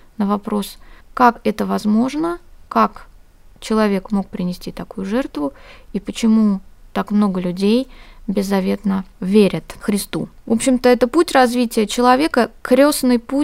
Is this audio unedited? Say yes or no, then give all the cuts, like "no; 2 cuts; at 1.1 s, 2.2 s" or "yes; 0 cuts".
no; 1 cut; at 10.4 s